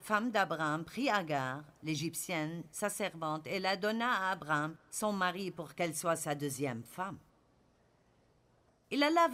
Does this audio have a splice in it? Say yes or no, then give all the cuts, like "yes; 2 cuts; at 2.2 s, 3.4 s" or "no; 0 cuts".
no; 0 cuts